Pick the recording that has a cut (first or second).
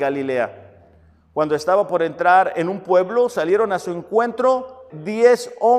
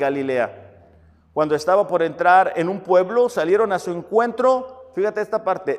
first